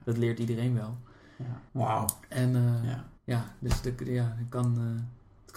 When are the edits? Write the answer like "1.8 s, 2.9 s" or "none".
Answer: 1.7 s, 3.2 s